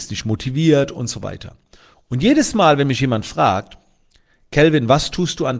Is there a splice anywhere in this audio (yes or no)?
no